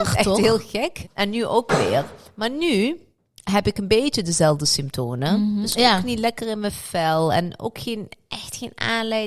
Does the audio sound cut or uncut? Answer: cut